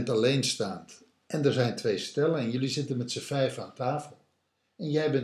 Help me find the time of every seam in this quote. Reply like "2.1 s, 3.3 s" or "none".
none